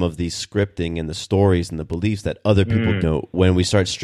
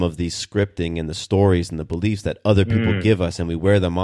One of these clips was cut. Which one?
first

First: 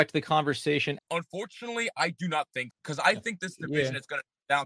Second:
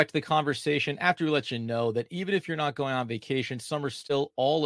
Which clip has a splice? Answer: first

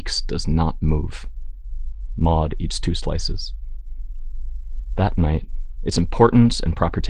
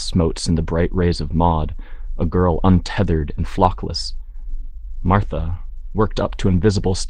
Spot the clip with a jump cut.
first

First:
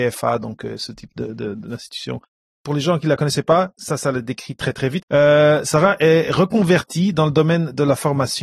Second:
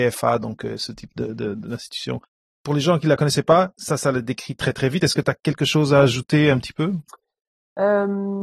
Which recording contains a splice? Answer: first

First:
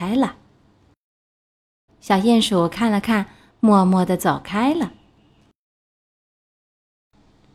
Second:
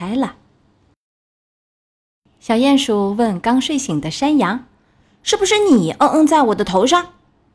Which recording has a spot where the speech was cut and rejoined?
first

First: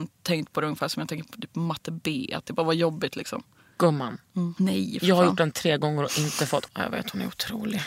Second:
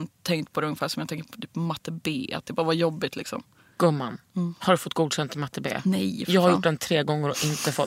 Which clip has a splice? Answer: first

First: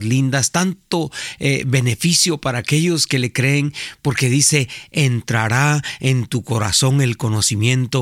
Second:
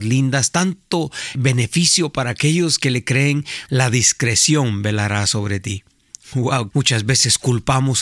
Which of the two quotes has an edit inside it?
second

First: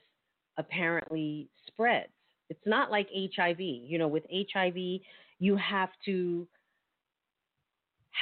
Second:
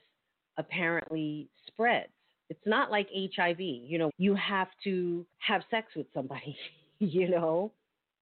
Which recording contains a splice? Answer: second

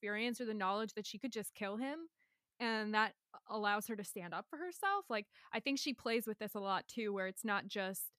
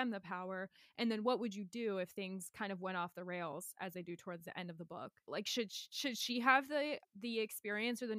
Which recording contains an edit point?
second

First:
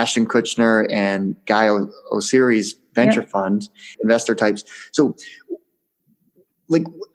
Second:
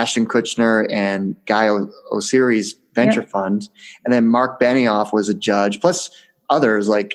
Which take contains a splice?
first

